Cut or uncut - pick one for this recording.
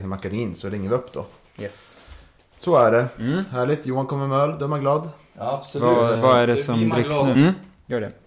cut